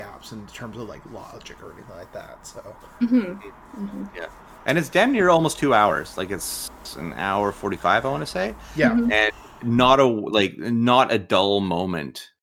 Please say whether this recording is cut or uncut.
uncut